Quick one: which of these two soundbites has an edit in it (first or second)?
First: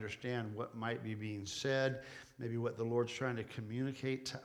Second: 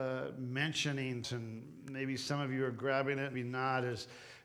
second